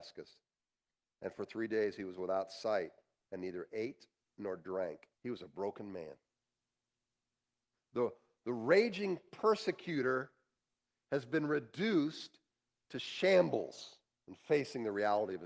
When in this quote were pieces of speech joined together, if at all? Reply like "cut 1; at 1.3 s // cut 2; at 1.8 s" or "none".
cut 1; at 5.1 s // cut 2; at 7.7 s